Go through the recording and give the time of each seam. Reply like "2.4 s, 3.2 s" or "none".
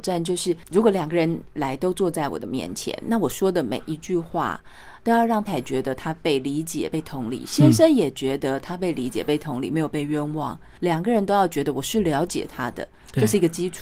5.5 s